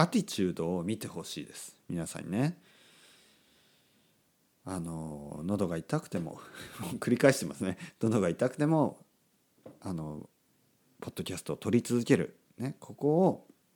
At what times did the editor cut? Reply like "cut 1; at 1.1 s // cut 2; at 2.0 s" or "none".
none